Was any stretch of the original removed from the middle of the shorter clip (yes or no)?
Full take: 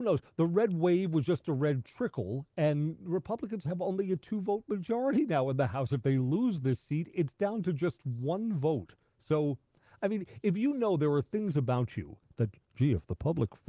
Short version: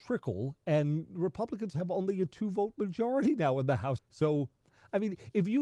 yes